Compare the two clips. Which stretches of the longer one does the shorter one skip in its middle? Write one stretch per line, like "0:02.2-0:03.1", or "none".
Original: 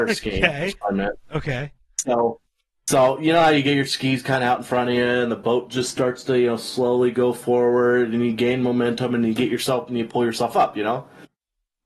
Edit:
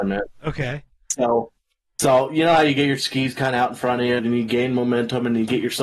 0:05.1-0:08.1